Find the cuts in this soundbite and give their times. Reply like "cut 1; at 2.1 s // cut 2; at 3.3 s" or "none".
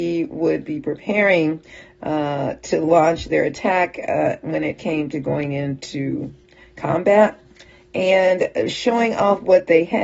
none